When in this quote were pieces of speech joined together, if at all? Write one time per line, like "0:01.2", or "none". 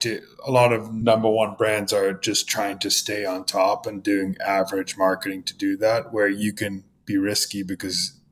none